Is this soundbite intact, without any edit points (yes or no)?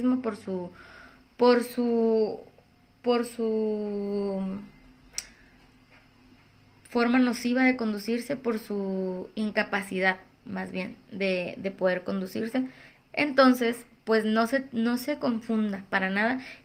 yes